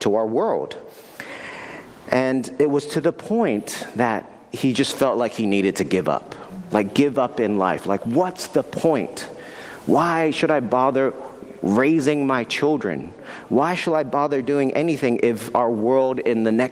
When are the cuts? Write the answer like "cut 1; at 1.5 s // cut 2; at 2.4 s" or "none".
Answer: none